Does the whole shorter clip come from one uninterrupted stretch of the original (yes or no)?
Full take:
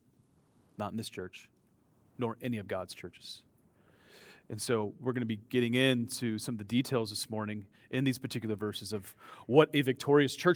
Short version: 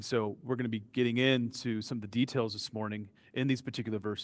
yes